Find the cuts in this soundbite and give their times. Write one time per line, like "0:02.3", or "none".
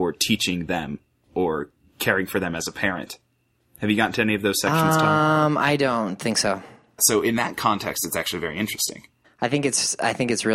0:07.0
0:09.2